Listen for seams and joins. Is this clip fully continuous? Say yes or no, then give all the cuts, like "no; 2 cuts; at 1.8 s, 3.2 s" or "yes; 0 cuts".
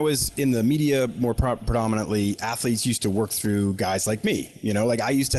yes; 0 cuts